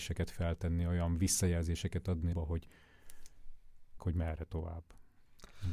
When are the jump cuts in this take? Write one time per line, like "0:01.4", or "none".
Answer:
0:02.3
0:04.0